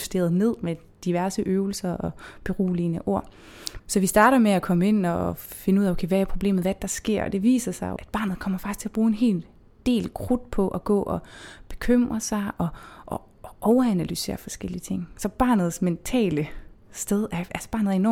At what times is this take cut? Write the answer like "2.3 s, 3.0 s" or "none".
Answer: 3.8 s, 8.0 s